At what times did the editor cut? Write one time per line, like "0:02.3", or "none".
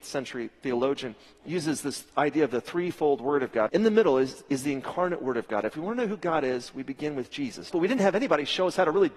0:03.7
0:07.7

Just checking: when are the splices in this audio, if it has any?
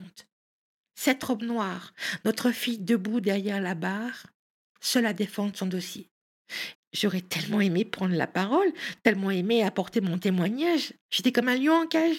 0:06.7
0:11.0

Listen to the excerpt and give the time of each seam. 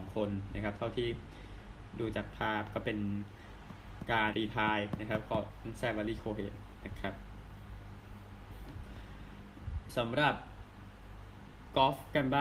0:04.3

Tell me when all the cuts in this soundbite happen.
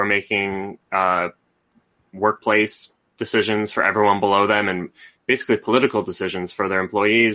none

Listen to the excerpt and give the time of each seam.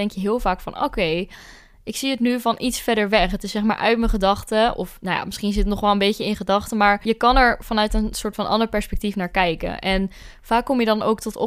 none

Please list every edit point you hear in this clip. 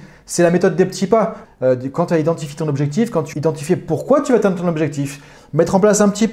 0:01.4
0:03.3

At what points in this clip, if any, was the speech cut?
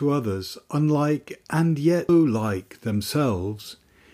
0:02.1

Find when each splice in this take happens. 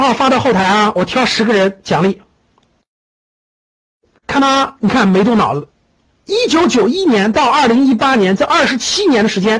none

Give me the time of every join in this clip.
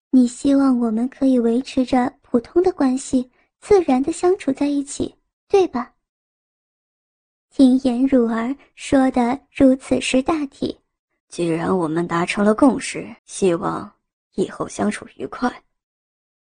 0:11.2
0:13.2

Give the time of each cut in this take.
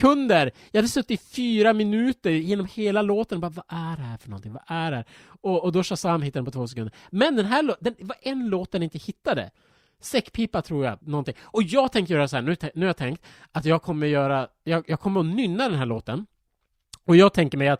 0:11.0

